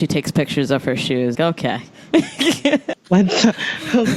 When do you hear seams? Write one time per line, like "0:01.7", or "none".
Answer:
0:01.3
0:02.9